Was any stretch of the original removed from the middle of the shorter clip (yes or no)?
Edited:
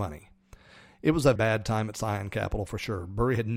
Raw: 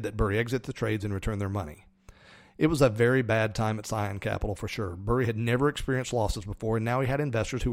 yes